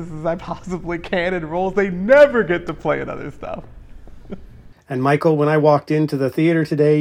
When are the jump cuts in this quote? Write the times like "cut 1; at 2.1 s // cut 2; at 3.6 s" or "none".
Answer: none